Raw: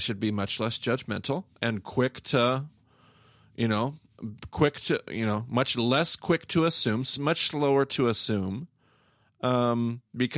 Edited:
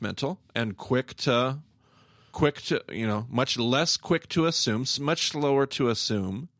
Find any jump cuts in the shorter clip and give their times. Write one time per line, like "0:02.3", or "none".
0:02.3